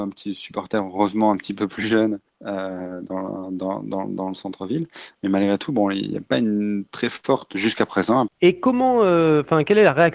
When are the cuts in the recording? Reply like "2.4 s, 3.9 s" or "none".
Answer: 2.3 s, 8.3 s